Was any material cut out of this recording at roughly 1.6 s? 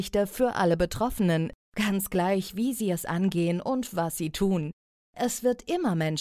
yes; 1 cut; at 1.6 s

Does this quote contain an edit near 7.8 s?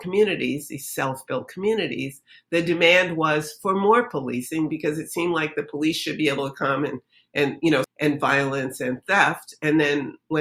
yes; 1 cut; at 7.8 s

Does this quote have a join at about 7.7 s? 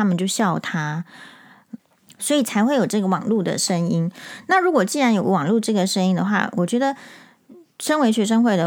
no; 1 cut; at 1.8 s

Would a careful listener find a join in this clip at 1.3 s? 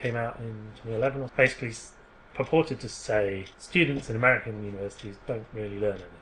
yes; 2 cuts; at 1.3 s, 3.5 s

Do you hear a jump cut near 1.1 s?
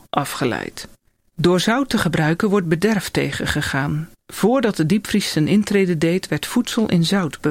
no; 0 cuts

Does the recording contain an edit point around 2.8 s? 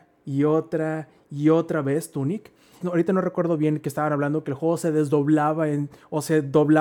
yes; 1 cut; at 2.8 s

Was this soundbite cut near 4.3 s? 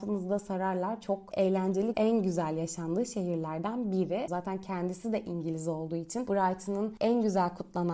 yes; 2 cuts; at 1.9 s, 4.3 s

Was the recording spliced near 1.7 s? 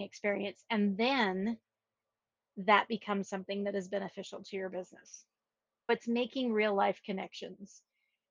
no; 1 cut; at 5.9 s

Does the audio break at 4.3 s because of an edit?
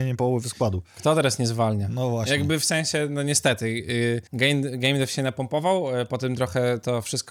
yes; 1 cut; at 4.3 s

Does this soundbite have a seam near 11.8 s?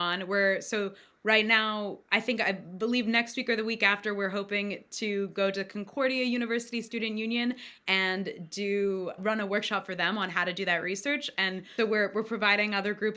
yes; 2 cuts; at 9.2 s, 11.8 s

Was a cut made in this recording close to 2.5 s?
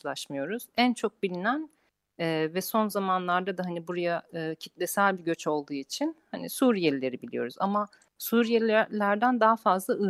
no; 0 cuts

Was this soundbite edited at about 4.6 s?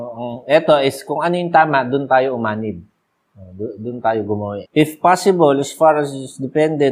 yes; 1 cut; at 4.6 s

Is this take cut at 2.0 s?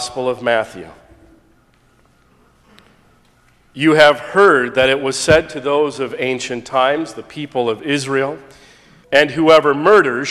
no; 1 cut; at 9.0 s

